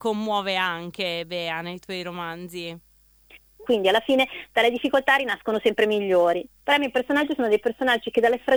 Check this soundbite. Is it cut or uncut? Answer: cut